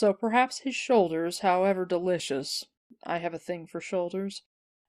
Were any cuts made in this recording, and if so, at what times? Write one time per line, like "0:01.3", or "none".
none